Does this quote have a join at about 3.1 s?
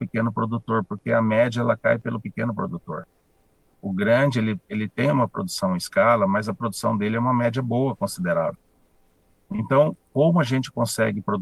no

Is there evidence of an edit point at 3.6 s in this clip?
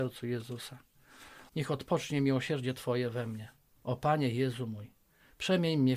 no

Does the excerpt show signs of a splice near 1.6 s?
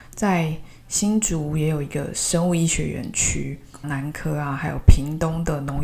no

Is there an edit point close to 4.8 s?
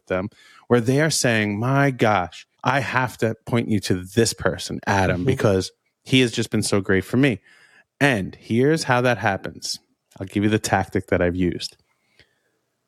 no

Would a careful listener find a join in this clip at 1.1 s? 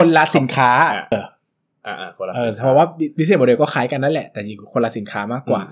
yes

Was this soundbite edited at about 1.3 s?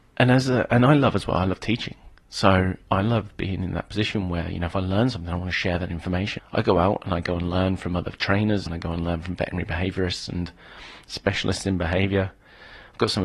no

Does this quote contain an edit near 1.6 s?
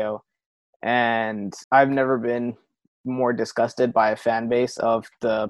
yes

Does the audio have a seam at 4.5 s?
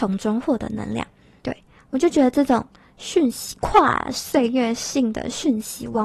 no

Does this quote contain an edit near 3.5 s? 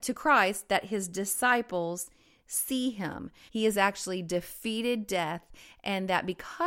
yes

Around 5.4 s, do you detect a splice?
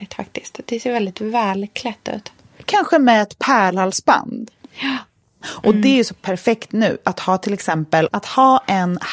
yes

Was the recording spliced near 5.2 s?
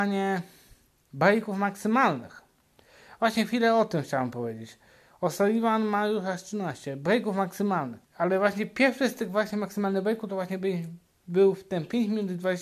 no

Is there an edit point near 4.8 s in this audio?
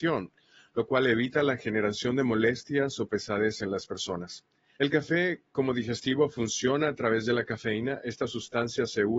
yes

